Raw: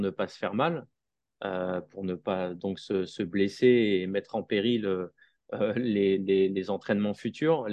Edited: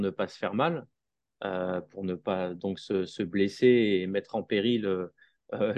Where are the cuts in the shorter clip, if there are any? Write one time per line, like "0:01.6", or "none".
none